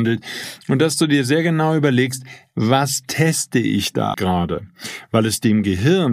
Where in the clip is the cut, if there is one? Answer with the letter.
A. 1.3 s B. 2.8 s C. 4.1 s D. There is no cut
C